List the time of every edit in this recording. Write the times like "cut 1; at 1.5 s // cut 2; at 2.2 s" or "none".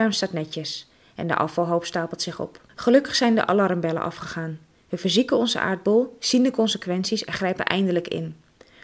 cut 1; at 2.7 s